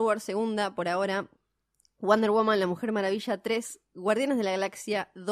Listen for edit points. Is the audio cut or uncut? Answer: uncut